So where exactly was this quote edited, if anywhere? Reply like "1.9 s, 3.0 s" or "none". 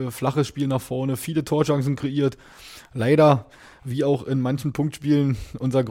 none